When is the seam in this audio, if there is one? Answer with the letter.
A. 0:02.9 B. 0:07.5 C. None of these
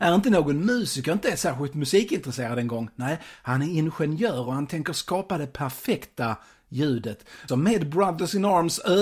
B